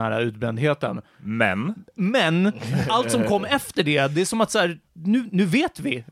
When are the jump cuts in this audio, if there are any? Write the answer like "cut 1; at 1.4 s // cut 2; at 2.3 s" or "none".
cut 1; at 4.9 s